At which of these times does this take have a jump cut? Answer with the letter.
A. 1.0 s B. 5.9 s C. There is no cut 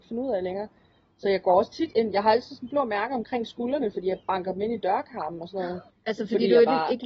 B